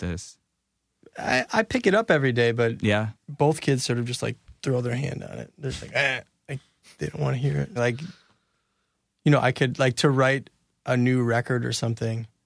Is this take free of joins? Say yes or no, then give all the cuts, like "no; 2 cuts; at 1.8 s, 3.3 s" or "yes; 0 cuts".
no; 1 cut; at 7.8 s